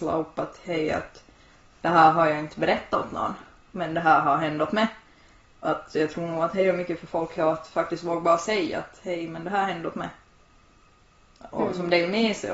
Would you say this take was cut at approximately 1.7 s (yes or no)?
no